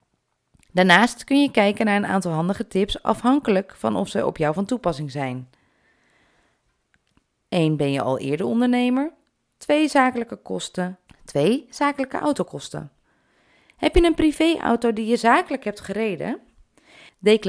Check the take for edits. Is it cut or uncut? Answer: cut